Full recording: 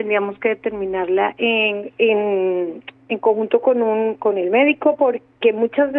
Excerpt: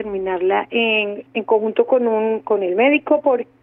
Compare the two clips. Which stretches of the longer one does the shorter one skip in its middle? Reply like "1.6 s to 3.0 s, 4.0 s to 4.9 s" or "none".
1.9 s to 3.0 s